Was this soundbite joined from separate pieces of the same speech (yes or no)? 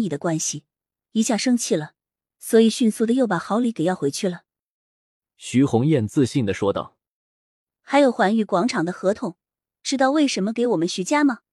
no